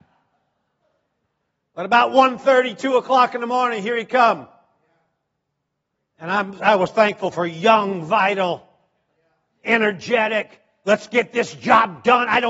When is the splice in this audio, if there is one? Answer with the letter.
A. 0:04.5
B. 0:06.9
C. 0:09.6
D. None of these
B